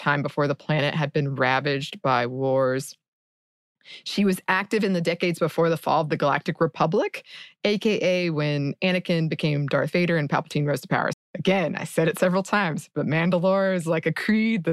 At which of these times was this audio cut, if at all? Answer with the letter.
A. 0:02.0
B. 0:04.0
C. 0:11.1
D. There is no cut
C